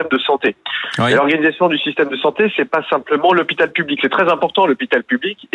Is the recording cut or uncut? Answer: uncut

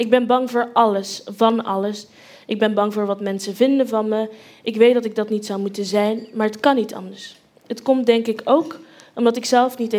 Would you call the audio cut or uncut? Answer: uncut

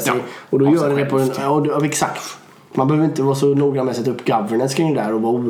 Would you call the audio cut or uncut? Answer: uncut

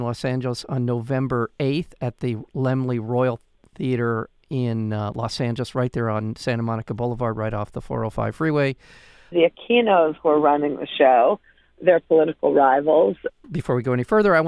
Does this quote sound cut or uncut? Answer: cut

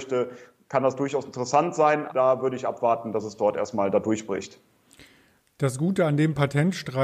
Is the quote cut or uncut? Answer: cut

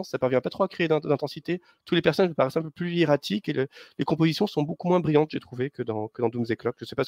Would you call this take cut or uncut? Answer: uncut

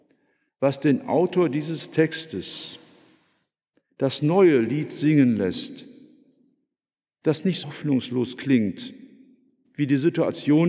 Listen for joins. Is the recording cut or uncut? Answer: cut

